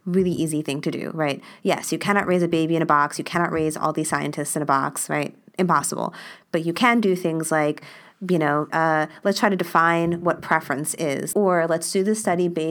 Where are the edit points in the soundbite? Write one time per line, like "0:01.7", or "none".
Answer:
0:08.7
0:11.3